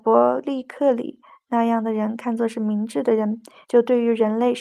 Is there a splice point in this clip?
yes; 1 cut; at 3.6 s

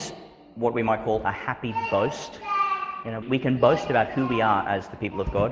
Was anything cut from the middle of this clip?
yes; 1 cut; at 3.2 s

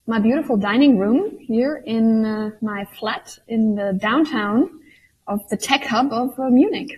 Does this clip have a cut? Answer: no; 0 cuts

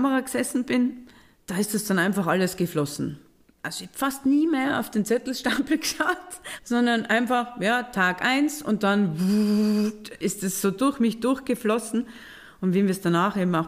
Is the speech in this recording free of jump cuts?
no; 1 cut; at 6.6 s

